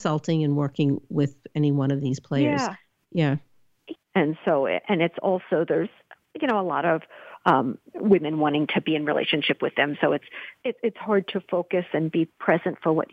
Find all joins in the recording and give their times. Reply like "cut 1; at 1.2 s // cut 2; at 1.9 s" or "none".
cut 1; at 3.9 s